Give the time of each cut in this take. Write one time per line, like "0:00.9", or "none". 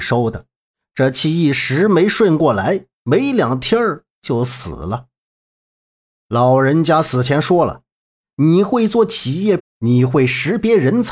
0:09.6